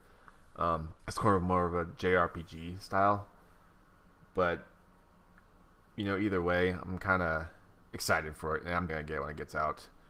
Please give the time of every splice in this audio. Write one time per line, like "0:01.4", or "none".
0:01.0
0:08.9